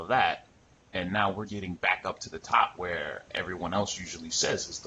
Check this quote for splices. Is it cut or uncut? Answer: cut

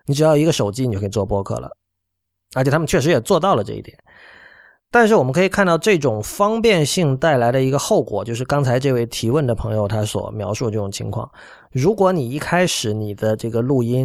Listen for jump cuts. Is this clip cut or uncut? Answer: uncut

